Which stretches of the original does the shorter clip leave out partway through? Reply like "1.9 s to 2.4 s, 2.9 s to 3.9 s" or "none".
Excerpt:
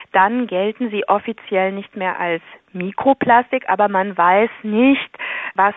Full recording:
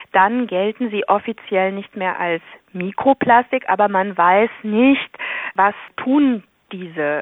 none